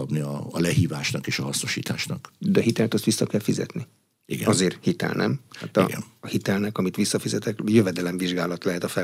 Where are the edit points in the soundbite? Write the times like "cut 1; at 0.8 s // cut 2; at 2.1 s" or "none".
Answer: none